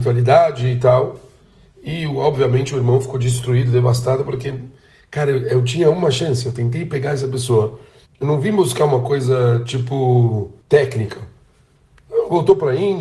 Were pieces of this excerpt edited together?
yes; 2 cuts; at 8.1 s, 10.6 s

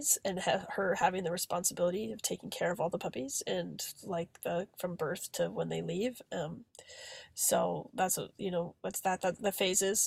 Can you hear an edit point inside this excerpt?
no; 0 cuts

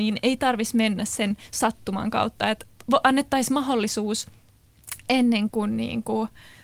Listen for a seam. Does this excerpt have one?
yes; 1 cut; at 5.5 s

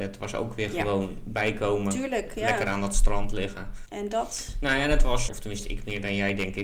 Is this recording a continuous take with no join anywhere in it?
no; 2 cuts; at 3.9 s, 5.3 s

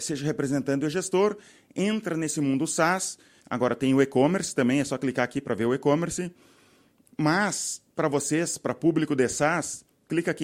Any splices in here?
yes; 1 cut; at 3.4 s

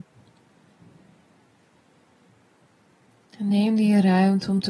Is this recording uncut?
yes; 0 cuts

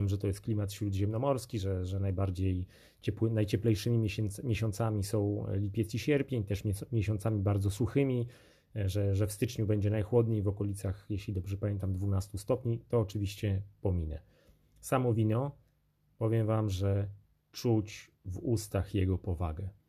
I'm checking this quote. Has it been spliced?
no; 0 cuts

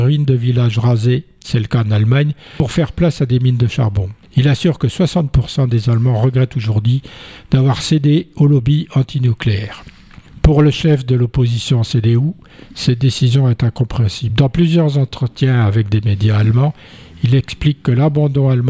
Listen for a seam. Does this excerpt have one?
no; 0 cuts

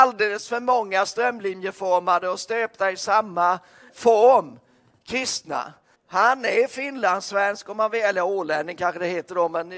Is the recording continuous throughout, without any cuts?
no; 2 cuts; at 3.9 s, 5.9 s

